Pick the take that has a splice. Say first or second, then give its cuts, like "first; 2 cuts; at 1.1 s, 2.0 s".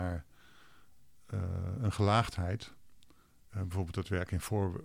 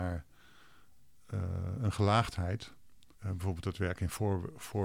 second; 1 cut; at 3.1 s